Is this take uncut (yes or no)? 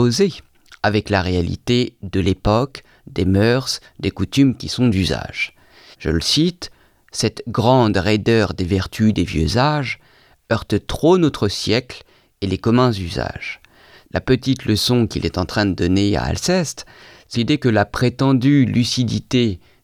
no